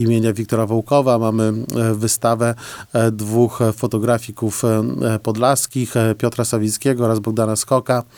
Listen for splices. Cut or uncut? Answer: uncut